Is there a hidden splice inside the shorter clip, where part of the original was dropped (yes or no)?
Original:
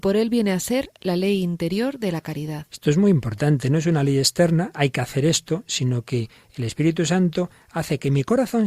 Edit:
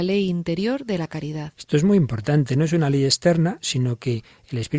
yes